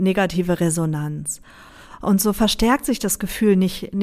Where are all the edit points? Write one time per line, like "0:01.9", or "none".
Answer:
none